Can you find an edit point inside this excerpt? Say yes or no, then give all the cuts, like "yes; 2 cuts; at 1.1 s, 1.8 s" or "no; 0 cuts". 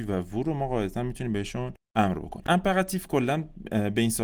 yes; 1 cut; at 1.8 s